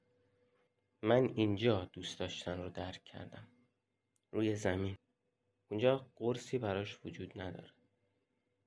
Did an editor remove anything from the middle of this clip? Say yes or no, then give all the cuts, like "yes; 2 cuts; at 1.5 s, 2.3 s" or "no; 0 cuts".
no; 0 cuts